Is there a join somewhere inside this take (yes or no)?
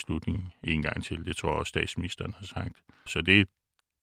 yes